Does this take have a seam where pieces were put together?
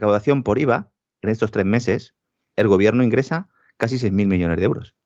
yes; 1 cut; at 2.5 s

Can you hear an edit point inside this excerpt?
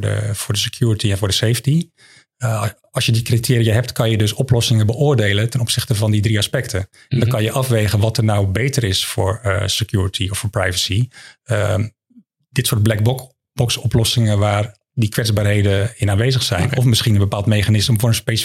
no; 0 cuts

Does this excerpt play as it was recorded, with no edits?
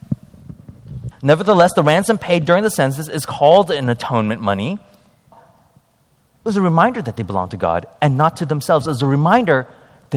no; 2 cuts; at 1.1 s, 5.3 s

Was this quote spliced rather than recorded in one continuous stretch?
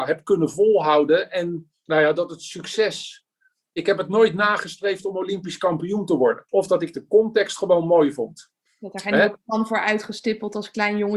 yes; 2 cuts; at 6.5 s, 8.7 s

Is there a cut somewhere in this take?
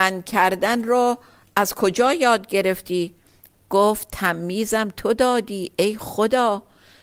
no; 0 cuts

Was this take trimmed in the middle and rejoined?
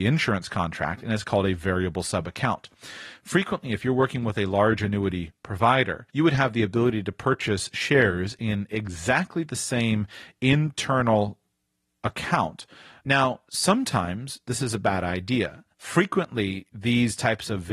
yes; 3 cuts; at 6.1 s, 13.0 s, 15.7 s

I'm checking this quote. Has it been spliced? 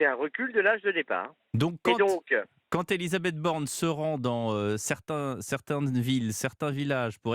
no; 0 cuts

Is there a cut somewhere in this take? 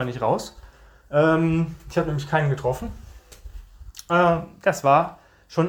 no; 0 cuts

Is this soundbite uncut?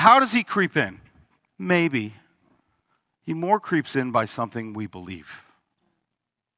no; 1 cut; at 1.5 s

